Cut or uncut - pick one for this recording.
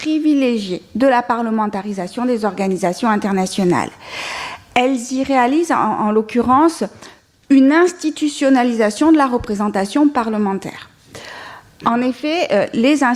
uncut